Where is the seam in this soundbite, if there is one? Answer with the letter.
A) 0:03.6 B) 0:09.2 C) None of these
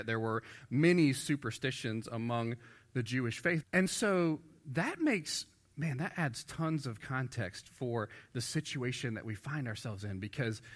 A